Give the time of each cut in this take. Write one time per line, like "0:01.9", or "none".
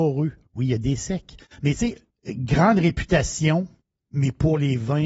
0:02.2